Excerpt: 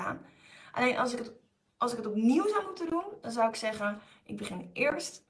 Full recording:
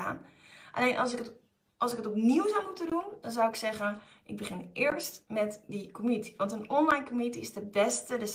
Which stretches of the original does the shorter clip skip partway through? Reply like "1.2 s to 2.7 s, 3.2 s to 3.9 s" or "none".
none